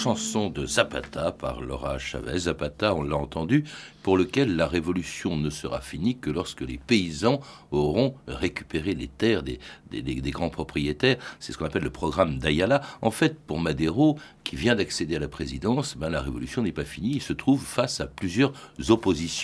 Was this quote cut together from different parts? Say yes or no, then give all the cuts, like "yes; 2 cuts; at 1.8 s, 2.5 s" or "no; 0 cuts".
no; 0 cuts